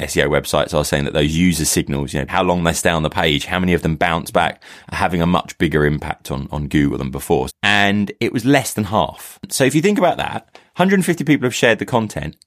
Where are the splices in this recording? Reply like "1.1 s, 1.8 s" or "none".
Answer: 2.3 s, 7.5 s